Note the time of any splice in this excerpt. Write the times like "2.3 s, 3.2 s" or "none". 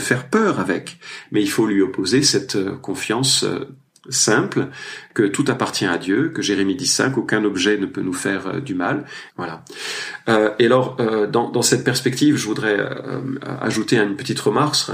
9.3 s